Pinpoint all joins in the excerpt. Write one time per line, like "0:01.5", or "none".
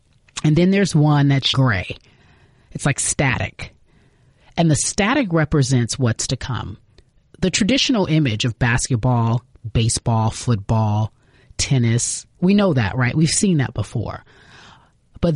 0:01.5